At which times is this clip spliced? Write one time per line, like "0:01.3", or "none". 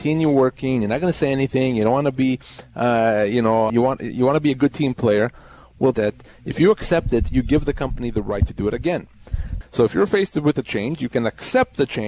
0:03.7
0:05.9
0:09.6